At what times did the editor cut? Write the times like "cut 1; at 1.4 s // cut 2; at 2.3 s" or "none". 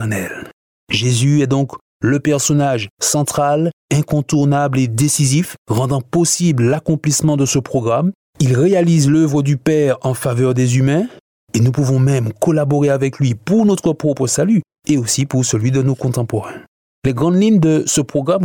cut 1; at 8.2 s